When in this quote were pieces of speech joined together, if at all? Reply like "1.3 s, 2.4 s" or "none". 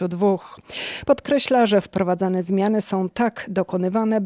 none

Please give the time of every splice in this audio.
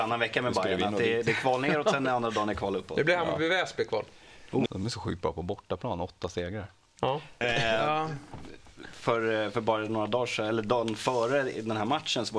4.7 s, 7.4 s

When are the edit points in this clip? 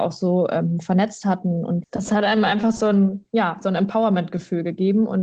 none

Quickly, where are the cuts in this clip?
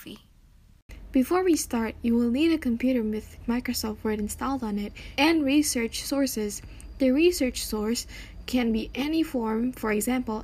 5.1 s

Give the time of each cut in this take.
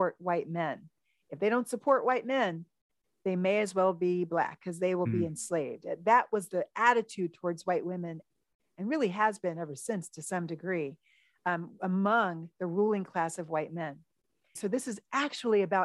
14.6 s

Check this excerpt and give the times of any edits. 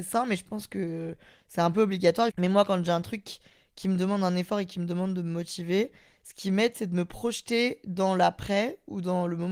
2.3 s

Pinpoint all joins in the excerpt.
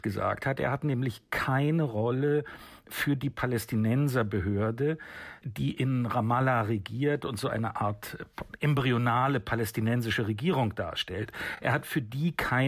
none

